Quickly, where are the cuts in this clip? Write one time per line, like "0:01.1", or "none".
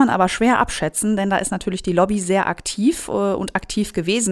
none